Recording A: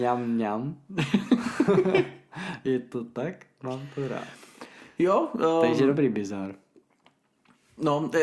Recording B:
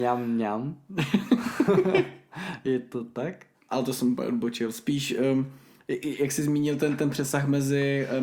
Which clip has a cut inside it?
B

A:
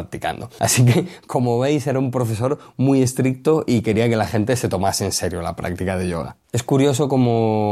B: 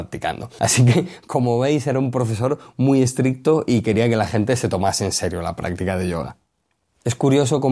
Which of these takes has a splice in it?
A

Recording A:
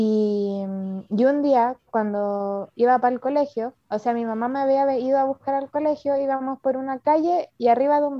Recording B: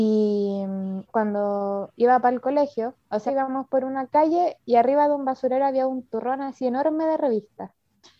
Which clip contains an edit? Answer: B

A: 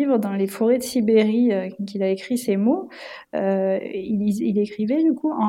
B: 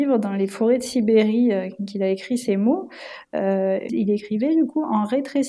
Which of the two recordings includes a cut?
B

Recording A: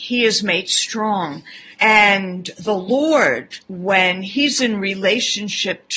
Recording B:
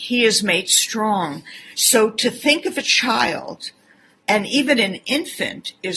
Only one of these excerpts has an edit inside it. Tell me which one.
A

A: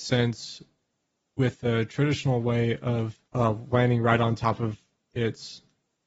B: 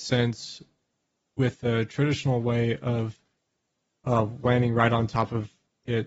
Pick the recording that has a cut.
A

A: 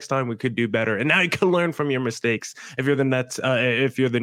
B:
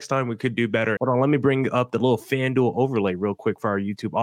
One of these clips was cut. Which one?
B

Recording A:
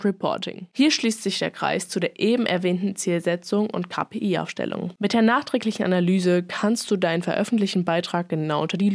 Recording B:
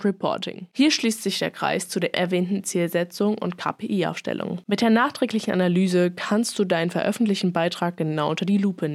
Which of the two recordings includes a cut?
B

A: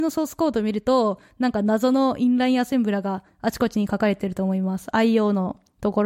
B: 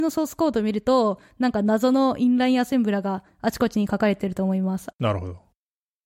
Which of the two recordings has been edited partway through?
B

